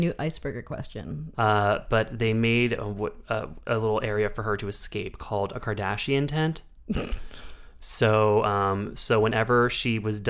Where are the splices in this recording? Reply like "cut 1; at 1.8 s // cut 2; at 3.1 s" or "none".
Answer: cut 1; at 1.3 s